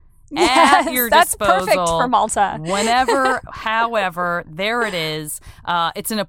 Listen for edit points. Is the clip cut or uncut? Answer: uncut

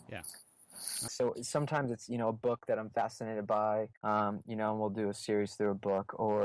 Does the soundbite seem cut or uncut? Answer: cut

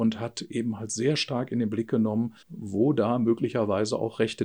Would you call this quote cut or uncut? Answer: cut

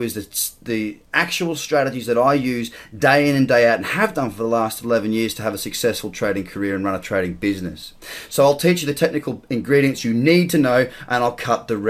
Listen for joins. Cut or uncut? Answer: uncut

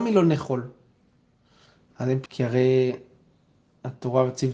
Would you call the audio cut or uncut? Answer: cut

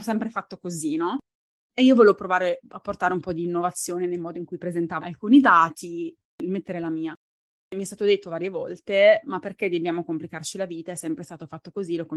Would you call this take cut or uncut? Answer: cut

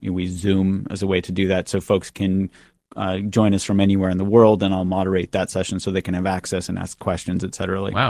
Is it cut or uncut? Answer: uncut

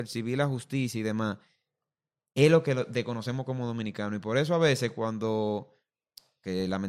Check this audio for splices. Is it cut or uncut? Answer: uncut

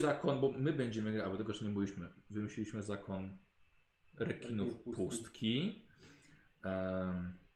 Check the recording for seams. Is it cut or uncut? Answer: uncut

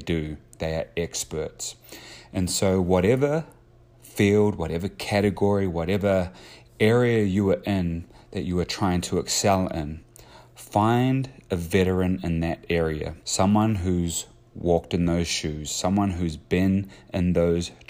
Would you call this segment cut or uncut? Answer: cut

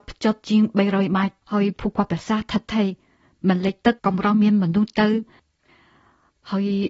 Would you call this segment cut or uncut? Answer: cut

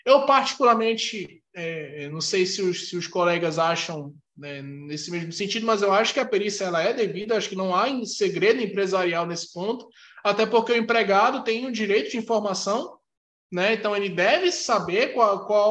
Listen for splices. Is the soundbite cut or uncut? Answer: uncut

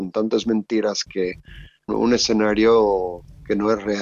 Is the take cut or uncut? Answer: cut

